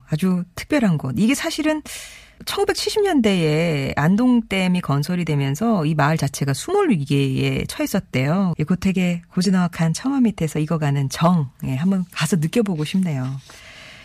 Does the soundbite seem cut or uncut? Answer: cut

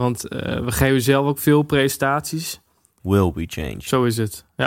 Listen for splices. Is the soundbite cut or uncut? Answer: cut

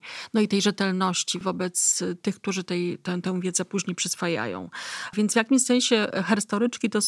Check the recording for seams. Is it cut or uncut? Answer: uncut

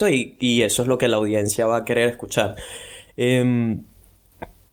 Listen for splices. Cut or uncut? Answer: uncut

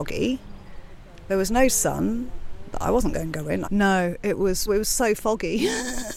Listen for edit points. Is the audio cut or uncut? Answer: cut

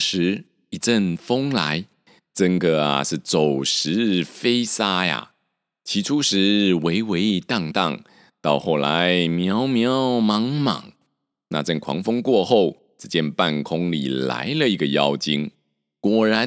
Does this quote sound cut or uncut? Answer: uncut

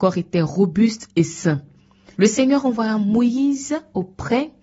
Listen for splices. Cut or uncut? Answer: cut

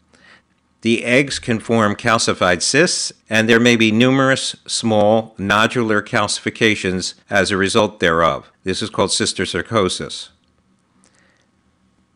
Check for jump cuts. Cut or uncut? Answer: cut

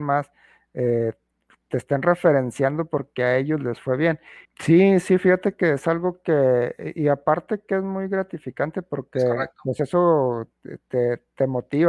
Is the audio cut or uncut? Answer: cut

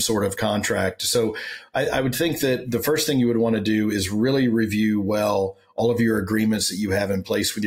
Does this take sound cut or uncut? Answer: uncut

